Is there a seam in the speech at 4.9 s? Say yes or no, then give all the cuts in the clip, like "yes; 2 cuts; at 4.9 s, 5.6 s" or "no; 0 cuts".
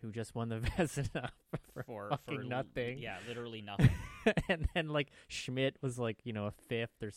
no; 0 cuts